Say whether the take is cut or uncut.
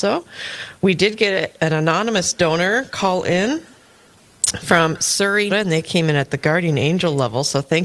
cut